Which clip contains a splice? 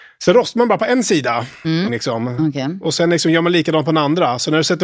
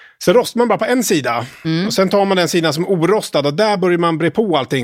first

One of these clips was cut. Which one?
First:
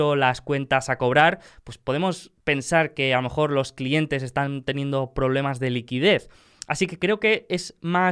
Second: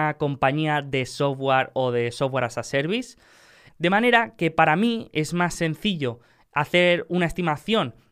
second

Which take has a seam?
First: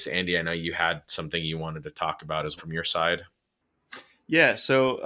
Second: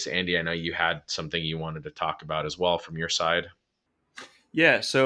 first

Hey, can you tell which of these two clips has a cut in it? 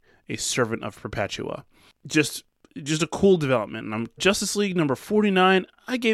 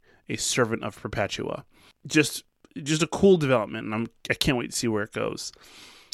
first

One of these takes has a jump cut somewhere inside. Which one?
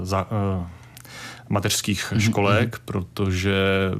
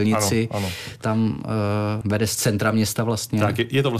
second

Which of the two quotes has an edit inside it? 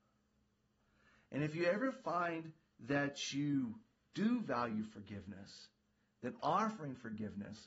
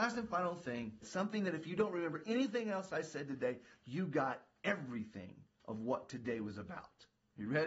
second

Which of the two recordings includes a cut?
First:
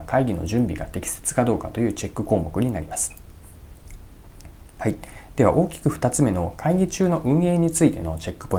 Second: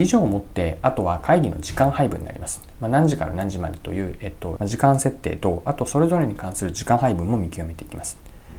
second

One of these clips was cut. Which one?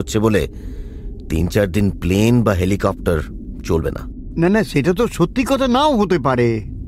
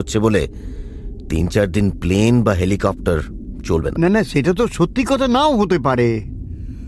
second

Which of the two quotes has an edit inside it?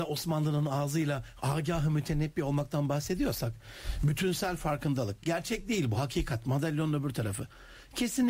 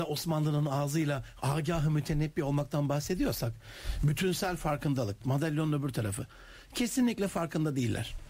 second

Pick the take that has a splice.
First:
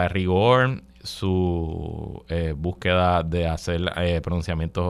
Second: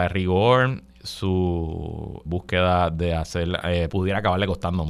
second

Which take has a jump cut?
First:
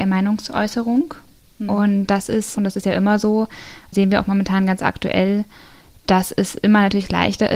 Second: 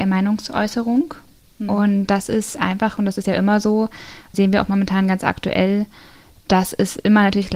first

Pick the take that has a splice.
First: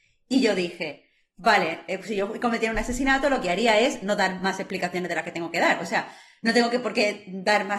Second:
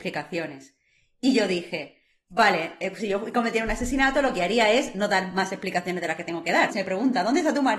second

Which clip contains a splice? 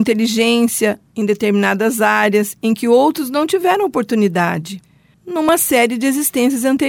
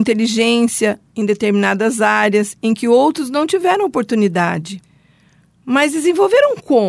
first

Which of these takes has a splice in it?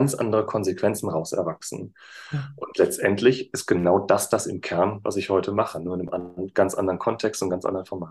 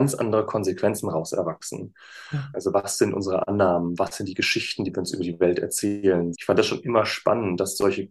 second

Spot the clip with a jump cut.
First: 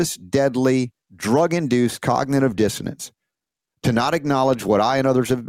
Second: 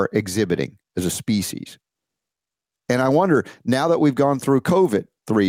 first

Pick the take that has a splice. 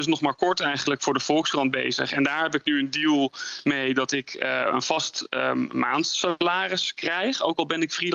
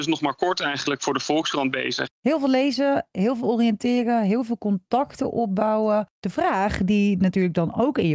second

